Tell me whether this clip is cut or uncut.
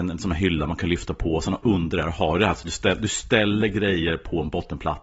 uncut